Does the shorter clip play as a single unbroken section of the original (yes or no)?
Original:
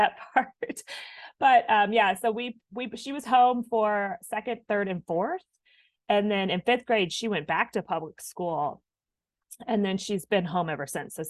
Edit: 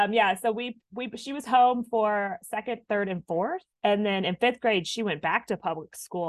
no